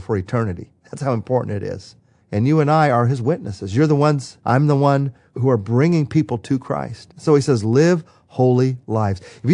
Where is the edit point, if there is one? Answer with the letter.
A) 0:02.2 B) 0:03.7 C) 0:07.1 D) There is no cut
A